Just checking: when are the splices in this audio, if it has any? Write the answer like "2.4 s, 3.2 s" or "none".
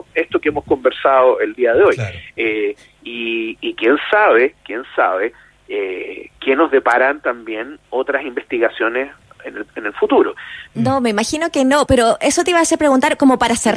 10.7 s, 11.9 s